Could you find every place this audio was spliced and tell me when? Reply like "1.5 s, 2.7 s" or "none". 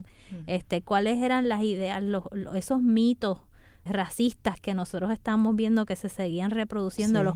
3.9 s